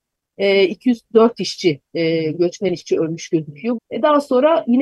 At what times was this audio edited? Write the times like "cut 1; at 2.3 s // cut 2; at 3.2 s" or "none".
cut 1; at 3.7 s